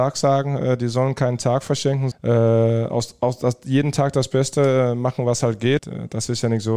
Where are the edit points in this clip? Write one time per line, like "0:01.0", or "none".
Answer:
0:02.1
0:05.8